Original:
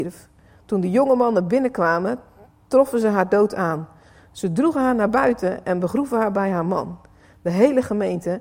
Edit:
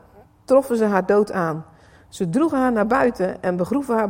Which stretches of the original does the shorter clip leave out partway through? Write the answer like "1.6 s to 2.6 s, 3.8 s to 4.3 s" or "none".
none